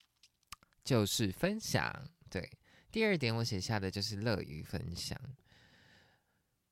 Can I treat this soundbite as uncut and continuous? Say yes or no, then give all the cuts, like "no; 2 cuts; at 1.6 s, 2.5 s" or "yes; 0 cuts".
yes; 0 cuts